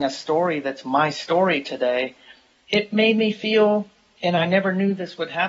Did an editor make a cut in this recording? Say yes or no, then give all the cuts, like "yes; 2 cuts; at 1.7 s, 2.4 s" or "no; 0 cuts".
no; 0 cuts